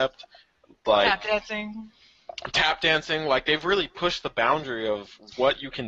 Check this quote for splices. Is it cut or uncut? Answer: uncut